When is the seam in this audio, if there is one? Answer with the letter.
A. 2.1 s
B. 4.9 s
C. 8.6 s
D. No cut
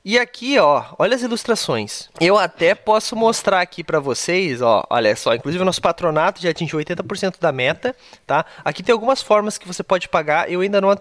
A